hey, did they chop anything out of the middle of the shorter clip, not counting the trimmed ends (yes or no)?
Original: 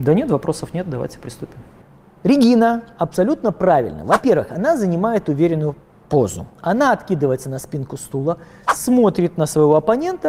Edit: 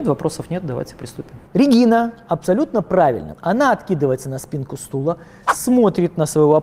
yes